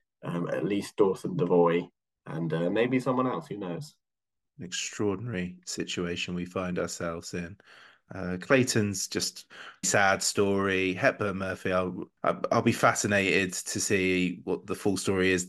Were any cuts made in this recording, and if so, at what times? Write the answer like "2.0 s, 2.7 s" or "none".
9.8 s